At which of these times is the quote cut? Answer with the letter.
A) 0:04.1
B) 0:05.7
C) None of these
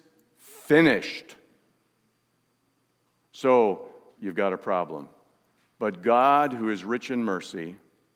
A